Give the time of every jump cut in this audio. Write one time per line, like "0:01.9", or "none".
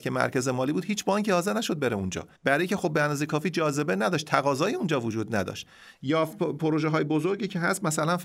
0:02.3